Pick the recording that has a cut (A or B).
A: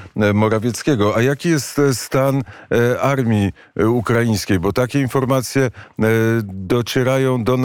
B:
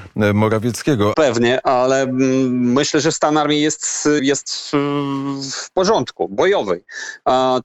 B